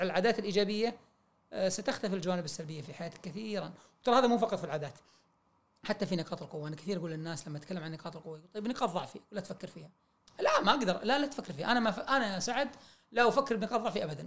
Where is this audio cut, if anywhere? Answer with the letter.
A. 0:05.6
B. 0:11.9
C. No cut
C